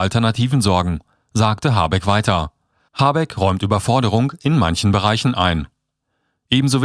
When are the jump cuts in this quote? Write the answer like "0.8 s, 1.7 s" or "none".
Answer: 2.9 s